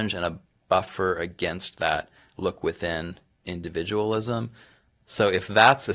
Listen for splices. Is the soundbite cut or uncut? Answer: uncut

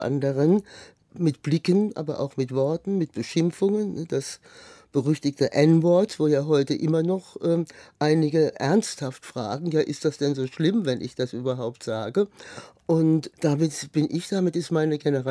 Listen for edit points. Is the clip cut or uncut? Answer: uncut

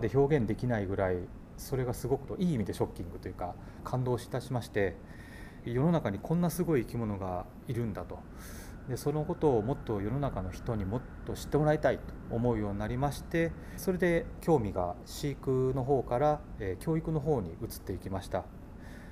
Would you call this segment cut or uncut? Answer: uncut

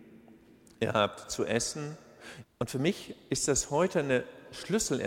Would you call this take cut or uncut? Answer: cut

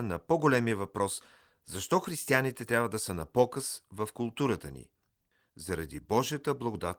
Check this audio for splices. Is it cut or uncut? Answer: uncut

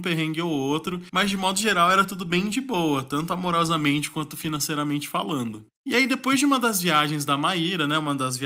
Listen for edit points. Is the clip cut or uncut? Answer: uncut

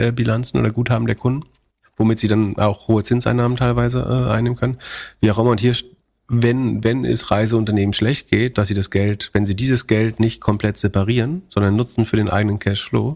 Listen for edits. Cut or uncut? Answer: cut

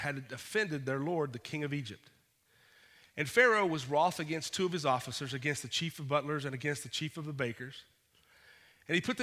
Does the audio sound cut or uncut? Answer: uncut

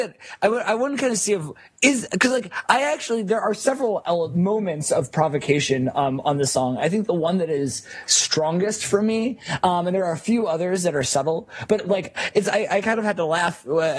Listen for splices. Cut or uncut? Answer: uncut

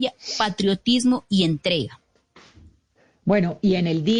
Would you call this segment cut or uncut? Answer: uncut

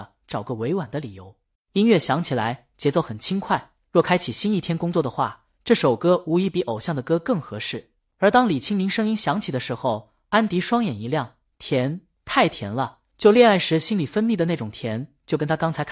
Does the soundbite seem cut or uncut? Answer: cut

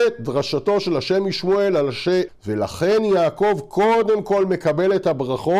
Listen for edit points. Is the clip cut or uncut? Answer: cut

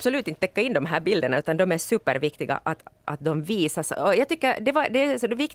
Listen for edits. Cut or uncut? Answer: uncut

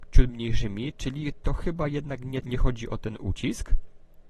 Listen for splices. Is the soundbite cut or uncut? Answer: cut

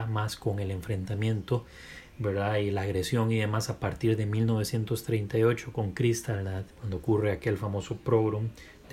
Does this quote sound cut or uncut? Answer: cut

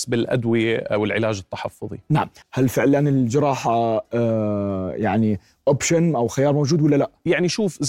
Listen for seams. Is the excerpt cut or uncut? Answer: cut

